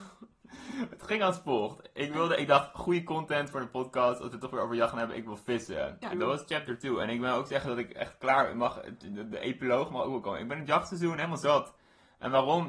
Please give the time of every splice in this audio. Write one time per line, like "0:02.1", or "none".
0:06.1